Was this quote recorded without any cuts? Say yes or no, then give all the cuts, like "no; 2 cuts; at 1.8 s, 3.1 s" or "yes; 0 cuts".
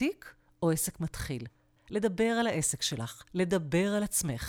no; 1 cut; at 1.8 s